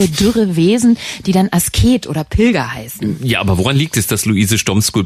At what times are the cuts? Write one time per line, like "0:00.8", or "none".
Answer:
none